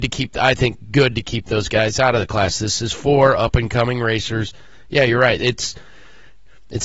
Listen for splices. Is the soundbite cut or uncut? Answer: uncut